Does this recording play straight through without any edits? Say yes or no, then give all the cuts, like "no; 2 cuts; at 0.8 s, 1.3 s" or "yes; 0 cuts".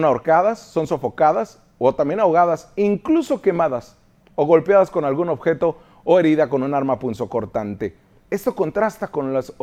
yes; 0 cuts